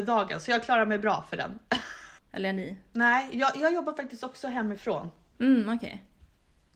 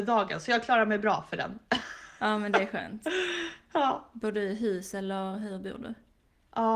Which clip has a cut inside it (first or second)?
first